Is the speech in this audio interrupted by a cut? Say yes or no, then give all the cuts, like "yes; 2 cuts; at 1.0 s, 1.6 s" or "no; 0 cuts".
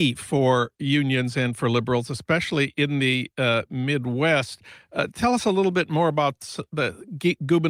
no; 0 cuts